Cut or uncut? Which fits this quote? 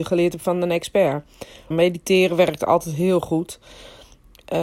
cut